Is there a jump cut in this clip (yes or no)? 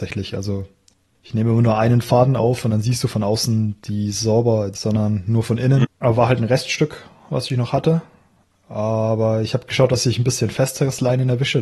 yes